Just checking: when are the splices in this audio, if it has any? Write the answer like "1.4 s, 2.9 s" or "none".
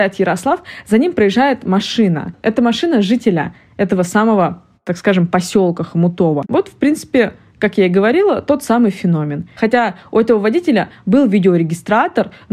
6.4 s, 9.5 s

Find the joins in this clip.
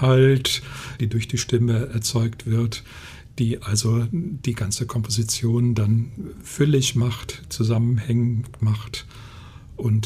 1.0 s

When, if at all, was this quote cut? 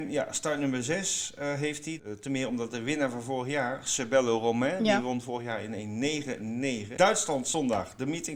2.0 s, 7.0 s

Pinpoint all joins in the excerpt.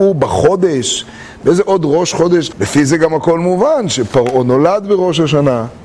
2.5 s

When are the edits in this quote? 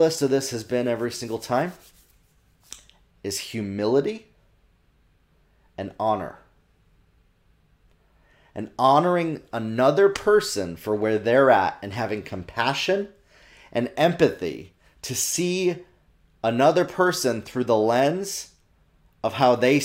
3.1 s

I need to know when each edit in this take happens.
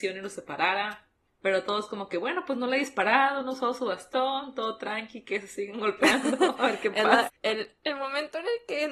7.3 s

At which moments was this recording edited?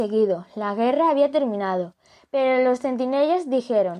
none

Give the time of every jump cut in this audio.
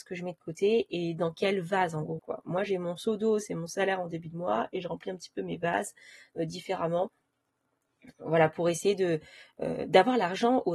2.2 s

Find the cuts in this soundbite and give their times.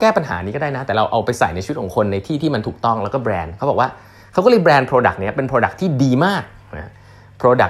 none

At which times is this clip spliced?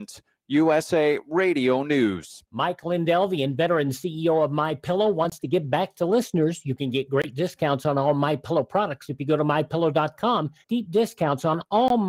2.5 s, 10.6 s

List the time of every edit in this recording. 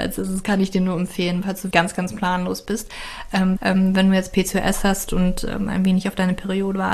1.7 s, 3.6 s

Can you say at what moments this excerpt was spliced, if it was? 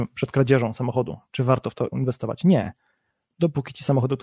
none

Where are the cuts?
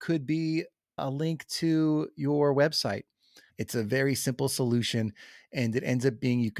3.5 s

